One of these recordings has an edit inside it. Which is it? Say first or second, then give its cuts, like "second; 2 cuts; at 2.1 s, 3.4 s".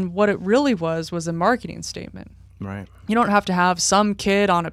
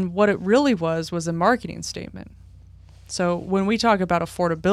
first; 1 cut; at 2.5 s